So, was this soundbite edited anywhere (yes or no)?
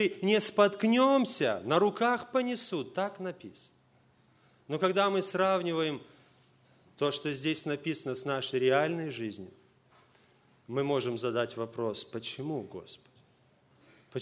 no